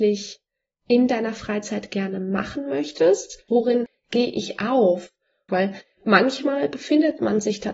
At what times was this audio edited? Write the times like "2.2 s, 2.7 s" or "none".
3.5 s, 5.5 s